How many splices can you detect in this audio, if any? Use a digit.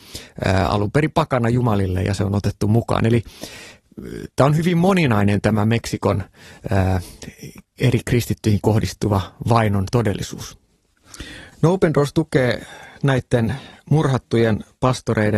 1